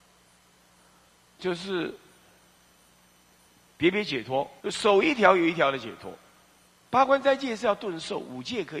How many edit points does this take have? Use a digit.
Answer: 2